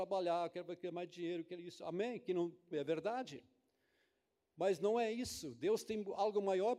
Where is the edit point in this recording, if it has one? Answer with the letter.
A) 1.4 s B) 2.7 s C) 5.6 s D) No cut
B